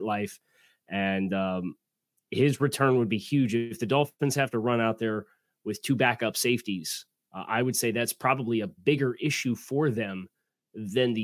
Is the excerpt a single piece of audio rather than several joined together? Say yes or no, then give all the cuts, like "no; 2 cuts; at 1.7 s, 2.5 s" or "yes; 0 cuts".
yes; 0 cuts